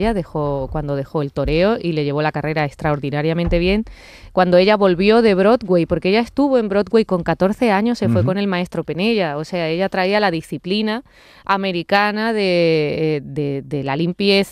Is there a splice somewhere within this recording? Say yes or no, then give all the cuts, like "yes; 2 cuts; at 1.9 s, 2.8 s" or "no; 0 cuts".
no; 0 cuts